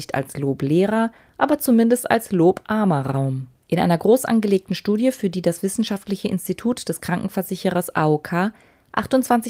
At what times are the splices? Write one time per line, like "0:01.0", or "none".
0:03.6